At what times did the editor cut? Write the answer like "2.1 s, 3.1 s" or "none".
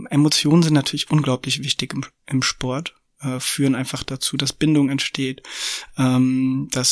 none